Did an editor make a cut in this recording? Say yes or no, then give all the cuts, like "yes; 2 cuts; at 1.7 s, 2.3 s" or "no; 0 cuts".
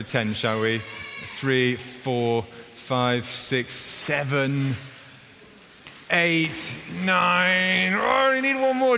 no; 0 cuts